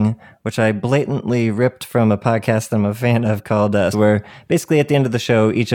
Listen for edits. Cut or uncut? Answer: cut